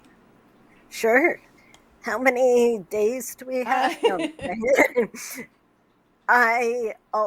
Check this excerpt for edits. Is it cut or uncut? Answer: uncut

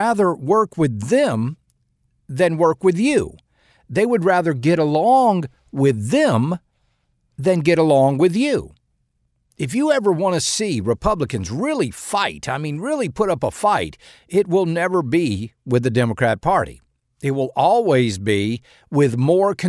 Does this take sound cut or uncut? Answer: uncut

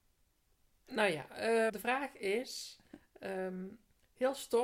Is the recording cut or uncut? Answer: cut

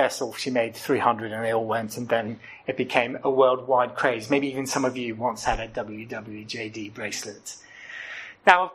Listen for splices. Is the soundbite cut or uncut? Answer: uncut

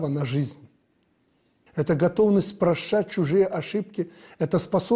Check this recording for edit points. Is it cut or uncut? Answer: cut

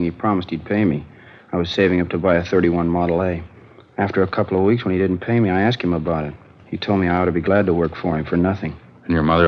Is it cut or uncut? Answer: uncut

